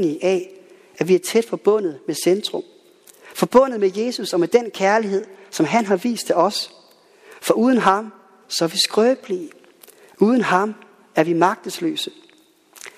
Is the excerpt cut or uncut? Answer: uncut